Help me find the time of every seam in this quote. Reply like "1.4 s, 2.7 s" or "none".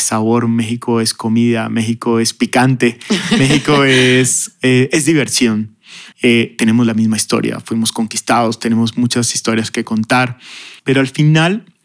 6.1 s, 10.8 s